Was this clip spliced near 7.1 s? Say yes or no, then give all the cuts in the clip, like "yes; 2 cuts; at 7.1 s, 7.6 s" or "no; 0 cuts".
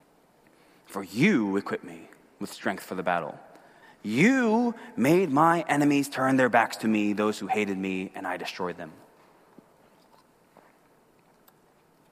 no; 1 cut; at 3.8 s